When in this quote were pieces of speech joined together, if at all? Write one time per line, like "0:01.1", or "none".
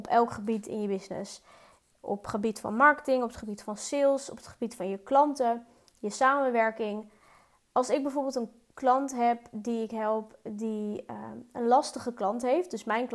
none